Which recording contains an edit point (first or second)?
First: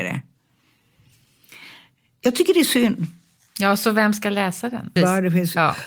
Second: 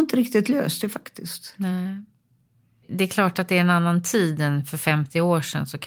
first